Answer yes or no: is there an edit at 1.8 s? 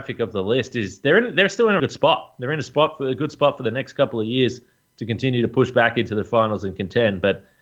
yes